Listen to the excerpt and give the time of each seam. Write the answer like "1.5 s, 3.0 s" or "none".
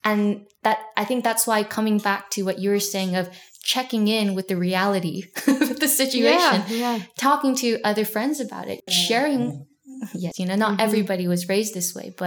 8.9 s, 10.3 s